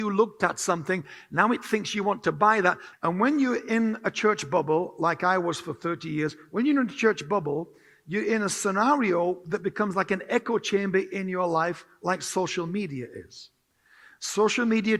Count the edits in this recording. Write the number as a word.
one